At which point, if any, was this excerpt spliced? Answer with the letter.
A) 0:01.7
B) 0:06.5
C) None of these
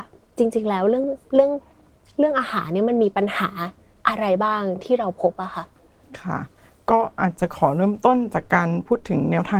C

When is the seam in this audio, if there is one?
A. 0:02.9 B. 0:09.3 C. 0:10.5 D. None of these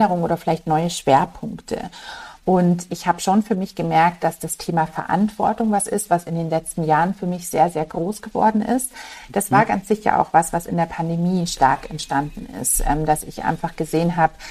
A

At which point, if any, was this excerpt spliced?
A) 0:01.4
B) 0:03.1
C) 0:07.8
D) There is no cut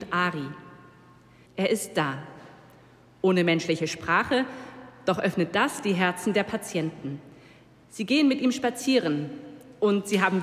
A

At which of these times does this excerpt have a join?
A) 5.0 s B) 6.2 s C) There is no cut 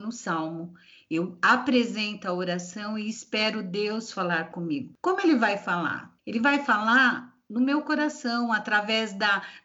B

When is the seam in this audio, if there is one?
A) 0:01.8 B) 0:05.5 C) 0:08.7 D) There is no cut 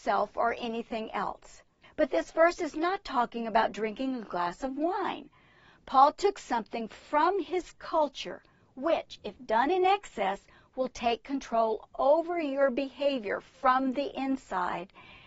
A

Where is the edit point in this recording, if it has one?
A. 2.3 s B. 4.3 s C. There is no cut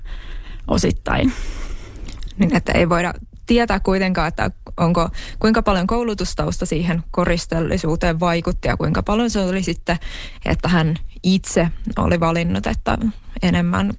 C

